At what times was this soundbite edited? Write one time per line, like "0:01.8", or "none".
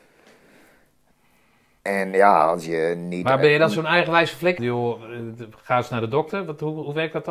0:04.6